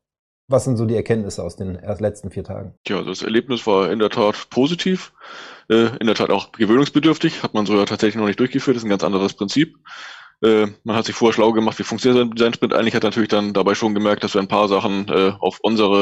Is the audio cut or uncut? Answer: cut